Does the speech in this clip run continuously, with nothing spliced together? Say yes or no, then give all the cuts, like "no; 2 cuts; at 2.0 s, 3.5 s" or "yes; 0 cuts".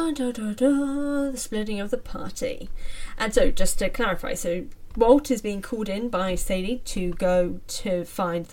yes; 0 cuts